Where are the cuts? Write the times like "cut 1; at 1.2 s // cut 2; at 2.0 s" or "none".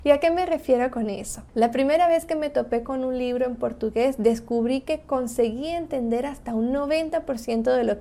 cut 1; at 1.5 s